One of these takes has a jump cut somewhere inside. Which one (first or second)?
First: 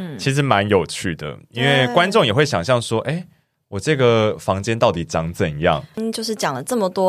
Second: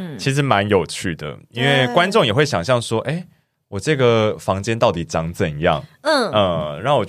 first